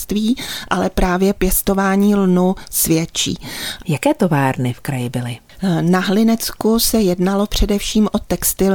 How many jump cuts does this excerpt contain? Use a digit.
1